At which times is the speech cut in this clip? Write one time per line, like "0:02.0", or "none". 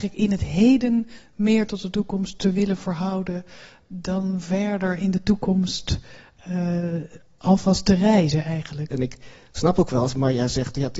0:08.9